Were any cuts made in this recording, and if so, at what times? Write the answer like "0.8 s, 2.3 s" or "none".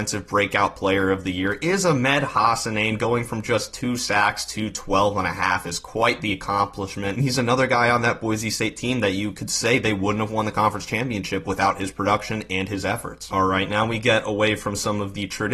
none